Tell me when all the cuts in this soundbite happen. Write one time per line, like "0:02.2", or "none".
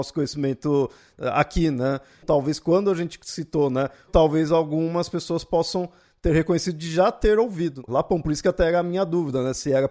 0:02.2
0:04.1
0:07.9